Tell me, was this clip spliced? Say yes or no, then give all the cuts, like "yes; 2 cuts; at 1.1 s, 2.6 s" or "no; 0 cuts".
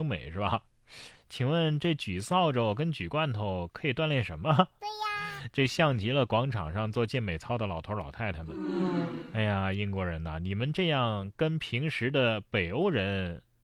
no; 0 cuts